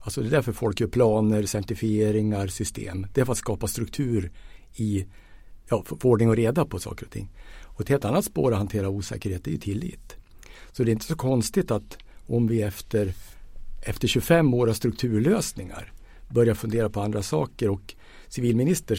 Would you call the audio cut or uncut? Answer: uncut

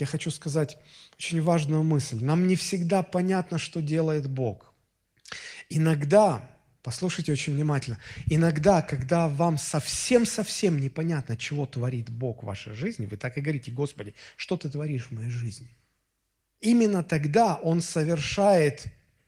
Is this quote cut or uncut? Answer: uncut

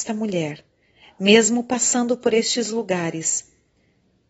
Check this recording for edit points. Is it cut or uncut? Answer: uncut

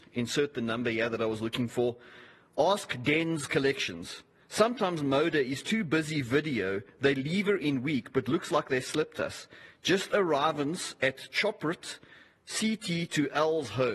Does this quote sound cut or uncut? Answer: uncut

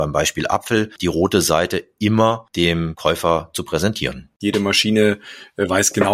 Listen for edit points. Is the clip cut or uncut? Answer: cut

